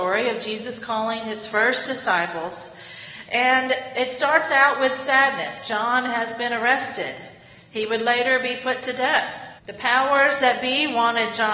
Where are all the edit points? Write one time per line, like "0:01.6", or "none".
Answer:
0:09.6